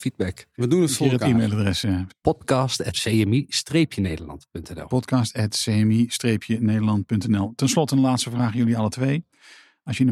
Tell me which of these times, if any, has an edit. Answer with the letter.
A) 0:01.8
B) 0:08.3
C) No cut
C